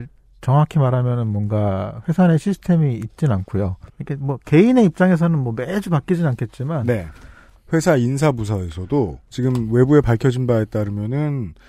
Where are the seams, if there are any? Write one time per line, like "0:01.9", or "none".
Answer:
0:03.9
0:07.5
0:09.3